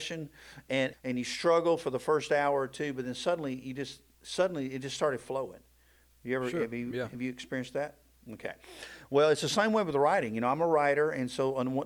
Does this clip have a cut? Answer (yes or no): yes